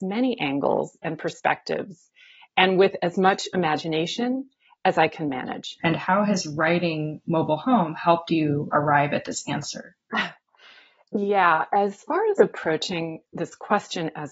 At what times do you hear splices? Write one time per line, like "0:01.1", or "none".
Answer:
0:05.8